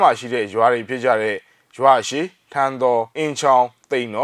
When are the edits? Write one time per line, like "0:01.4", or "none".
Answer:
0:03.1